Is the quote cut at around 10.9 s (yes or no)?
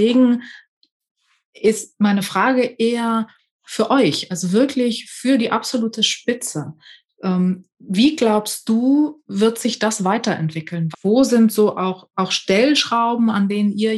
yes